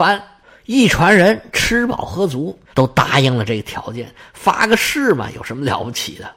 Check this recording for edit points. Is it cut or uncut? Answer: cut